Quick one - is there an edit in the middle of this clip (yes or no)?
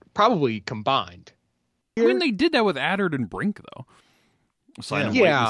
yes